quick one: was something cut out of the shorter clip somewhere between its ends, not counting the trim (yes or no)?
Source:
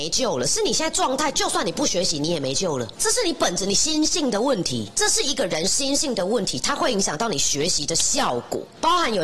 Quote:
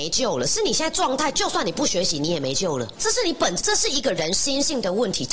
yes